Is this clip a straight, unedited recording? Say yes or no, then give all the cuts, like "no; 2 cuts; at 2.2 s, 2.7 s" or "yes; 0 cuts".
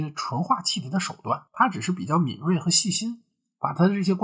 no; 1 cut; at 1.5 s